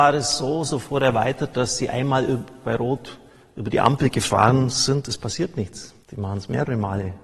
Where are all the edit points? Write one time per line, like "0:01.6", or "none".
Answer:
0:06.0